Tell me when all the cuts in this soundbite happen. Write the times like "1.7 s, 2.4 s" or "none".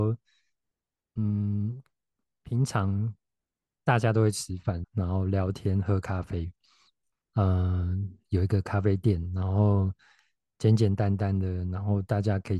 4.8 s, 7.3 s

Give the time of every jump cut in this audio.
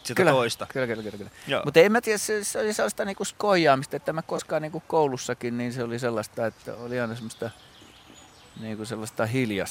none

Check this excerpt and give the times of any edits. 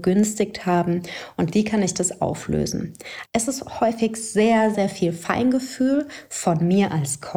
3.3 s, 4.7 s

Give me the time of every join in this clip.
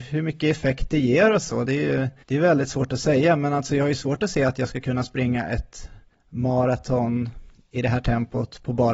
none

